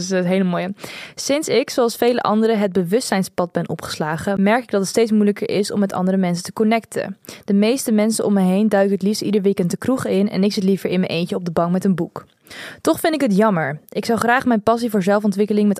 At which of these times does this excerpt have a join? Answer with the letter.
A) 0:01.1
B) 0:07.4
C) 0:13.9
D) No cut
D